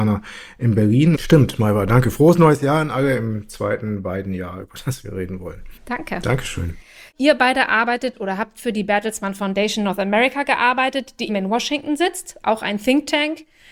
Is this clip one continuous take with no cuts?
no; 3 cuts; at 1.1 s, 5.8 s, 11.3 s

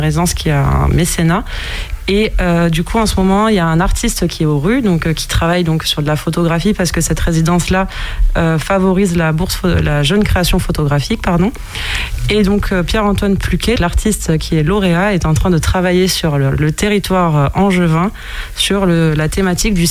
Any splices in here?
yes; 1 cut; at 13.8 s

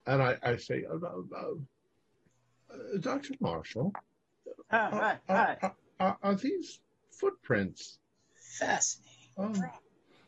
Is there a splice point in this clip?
no; 0 cuts

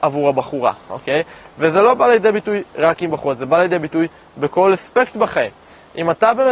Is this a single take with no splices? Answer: yes; 0 cuts

